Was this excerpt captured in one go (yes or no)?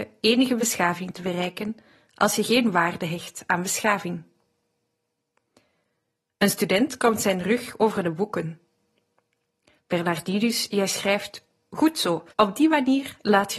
no